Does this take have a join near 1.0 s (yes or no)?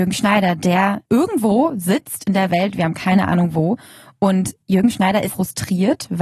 yes